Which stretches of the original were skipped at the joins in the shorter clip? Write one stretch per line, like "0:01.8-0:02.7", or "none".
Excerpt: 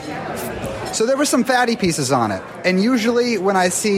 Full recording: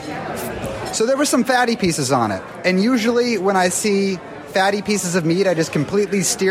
none